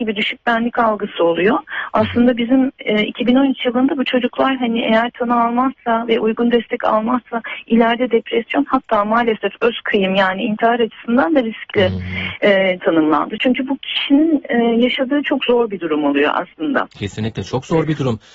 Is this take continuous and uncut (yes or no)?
no